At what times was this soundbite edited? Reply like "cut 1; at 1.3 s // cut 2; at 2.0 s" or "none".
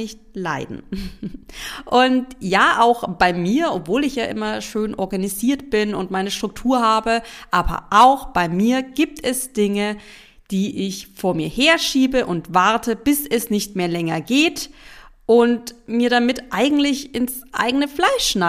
none